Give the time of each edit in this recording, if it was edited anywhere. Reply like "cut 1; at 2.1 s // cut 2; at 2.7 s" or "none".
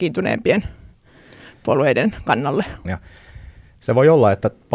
cut 1; at 2.9 s